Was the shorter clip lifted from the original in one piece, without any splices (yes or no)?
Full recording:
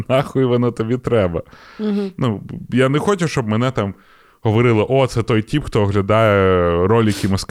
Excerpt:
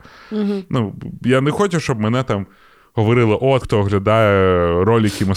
no